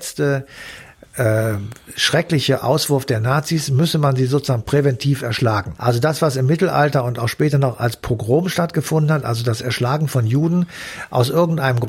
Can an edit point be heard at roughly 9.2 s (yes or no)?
no